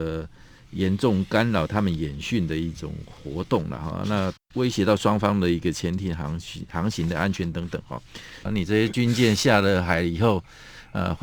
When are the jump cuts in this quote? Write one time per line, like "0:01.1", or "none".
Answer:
0:04.4
0:08.5